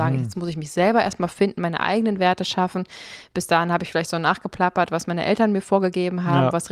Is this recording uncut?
yes; 0 cuts

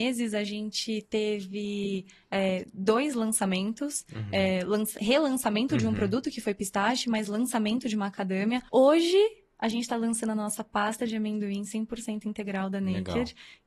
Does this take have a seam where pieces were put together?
yes; 1 cut; at 8.7 s

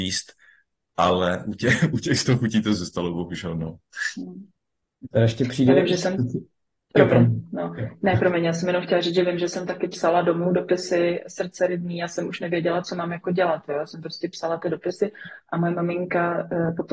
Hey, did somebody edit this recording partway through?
no; 0 cuts

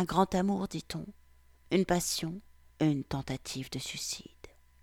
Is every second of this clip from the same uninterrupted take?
no; 1 cut; at 2.7 s

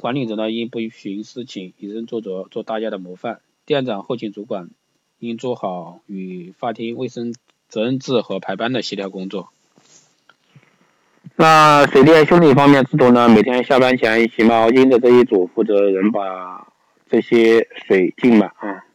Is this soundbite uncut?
yes; 0 cuts

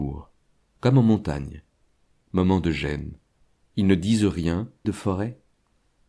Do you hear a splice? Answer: yes; 1 cut; at 4.8 s

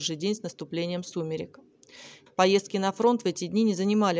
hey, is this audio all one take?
no; 1 cut; at 2.3 s

